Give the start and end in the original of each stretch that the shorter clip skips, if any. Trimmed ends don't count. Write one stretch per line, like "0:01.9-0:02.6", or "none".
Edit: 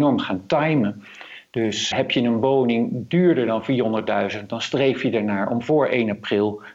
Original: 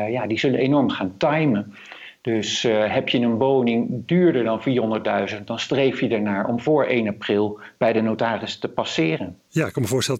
0:02.6-0:02.9